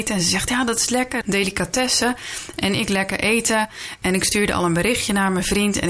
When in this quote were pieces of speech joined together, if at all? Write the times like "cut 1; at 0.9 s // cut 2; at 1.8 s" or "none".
cut 1; at 1.2 s